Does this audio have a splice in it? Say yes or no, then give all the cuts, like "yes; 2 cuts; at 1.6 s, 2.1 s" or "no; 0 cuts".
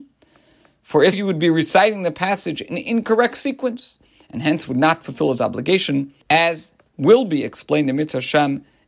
yes; 2 cuts; at 1.1 s, 6.2 s